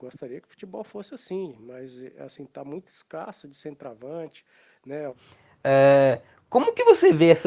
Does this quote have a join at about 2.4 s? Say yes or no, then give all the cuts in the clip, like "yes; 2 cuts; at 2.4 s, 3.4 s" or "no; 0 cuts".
no; 1 cut; at 5.1 s